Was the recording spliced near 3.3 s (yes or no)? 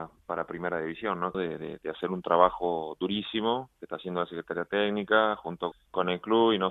no